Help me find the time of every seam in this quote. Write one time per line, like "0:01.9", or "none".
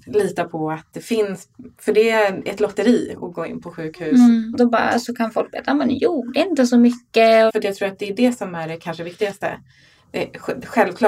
0:04.5
0:07.5